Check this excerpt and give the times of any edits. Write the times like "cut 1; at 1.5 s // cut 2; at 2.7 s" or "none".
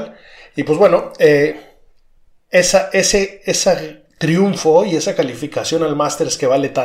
none